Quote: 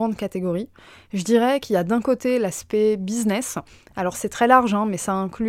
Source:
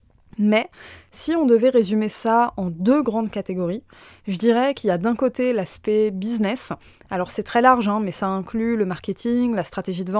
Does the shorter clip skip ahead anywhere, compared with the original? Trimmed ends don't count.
no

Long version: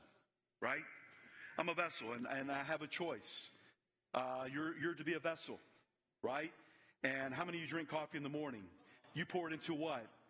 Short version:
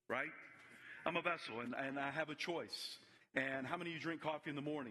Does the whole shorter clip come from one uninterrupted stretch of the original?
no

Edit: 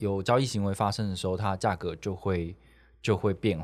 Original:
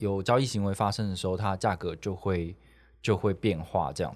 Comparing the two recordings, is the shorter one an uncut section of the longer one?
yes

